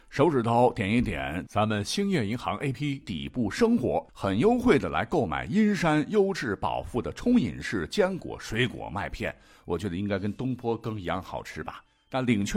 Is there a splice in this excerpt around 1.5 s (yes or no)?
no